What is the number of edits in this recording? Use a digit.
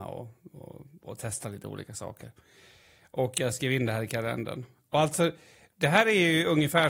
0